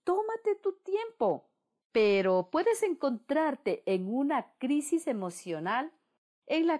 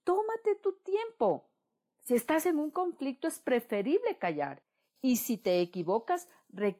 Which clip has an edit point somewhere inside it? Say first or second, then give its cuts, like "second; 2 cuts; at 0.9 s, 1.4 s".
first; 1 cut; at 1.8 s